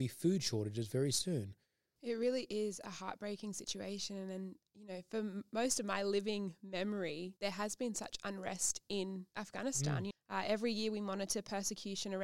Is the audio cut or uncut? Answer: cut